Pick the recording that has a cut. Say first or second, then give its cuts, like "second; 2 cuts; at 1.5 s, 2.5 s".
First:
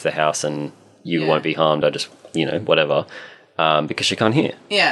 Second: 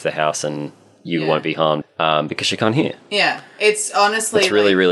second; 1 cut; at 1.8 s